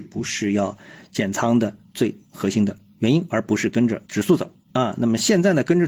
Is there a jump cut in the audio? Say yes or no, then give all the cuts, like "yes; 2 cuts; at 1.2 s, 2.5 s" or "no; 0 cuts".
no; 0 cuts